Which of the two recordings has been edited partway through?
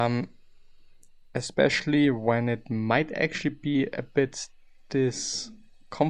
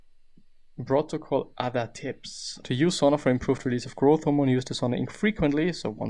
second; 1 cut; at 2.6 s

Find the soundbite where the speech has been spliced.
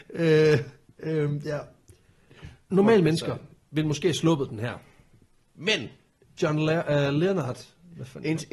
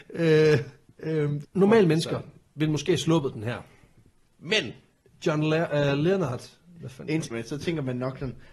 second; 2 cuts; at 1.4 s, 7.3 s

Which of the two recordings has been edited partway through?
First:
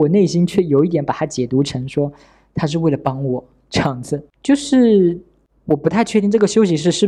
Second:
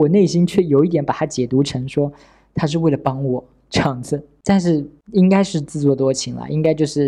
first; 1 cut; at 4.3 s

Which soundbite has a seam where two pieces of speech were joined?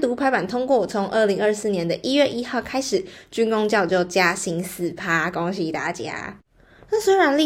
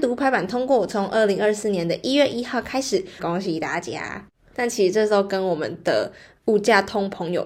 second; 2 cuts; at 3.2 s, 4.5 s

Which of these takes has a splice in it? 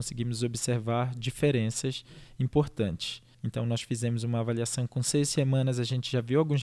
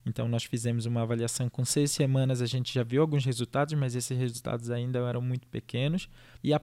first; 1 cut; at 3.4 s

